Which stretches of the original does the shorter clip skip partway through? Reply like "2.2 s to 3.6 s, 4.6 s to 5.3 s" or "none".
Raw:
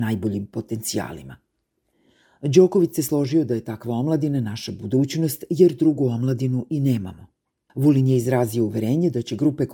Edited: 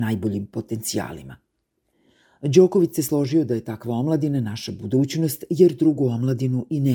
none